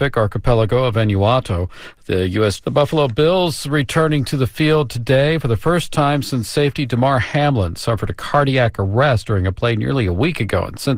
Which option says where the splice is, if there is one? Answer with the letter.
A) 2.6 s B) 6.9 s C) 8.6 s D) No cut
A